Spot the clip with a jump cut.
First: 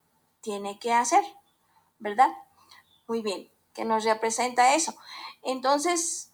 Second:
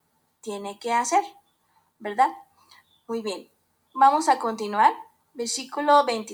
first; 1 cut; at 3.7 s

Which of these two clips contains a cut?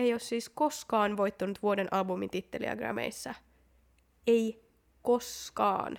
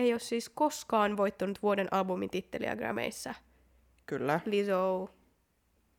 second; 1 cut; at 4.0 s

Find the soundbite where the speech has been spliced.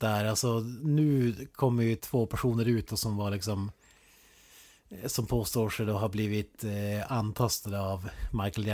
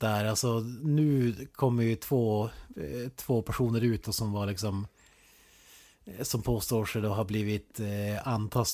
first; 1 cut; at 2.0 s

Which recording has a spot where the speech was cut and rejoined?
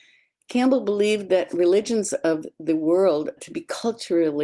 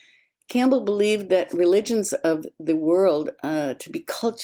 first; 1 cut; at 3.4 s

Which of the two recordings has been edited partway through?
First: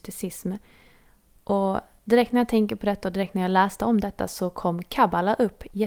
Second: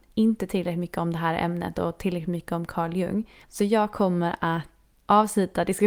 second; 2 cuts; at 3.4 s, 4.9 s

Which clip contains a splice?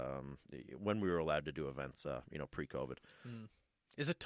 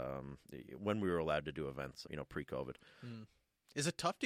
second; 1 cut; at 2.0 s

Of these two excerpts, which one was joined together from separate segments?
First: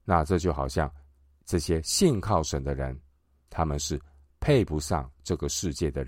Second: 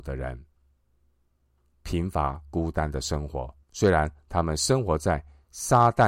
second; 2 cuts; at 1.7 s, 3.6 s

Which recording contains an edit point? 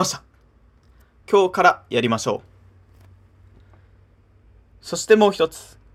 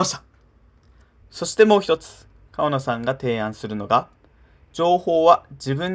second; 1 cut; at 1.2 s

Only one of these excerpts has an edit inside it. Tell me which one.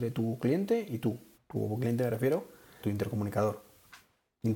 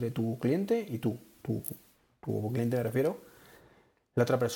first; 2 cuts; at 1.3 s, 2.8 s

